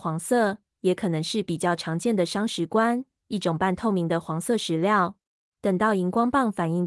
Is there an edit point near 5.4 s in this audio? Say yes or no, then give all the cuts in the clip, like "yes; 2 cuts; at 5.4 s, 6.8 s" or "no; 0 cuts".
yes; 1 cut; at 5.4 s